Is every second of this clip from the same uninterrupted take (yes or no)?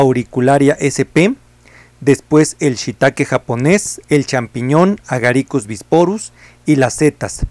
no